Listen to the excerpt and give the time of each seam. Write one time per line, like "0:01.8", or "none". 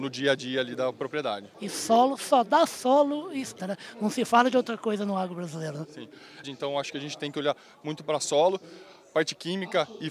0:01.5
0:03.6
0:06.4